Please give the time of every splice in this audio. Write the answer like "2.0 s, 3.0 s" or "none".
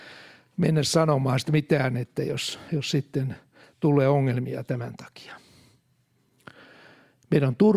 none